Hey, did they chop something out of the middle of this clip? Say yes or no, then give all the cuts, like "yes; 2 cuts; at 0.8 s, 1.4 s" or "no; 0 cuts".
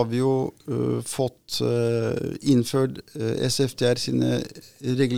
no; 0 cuts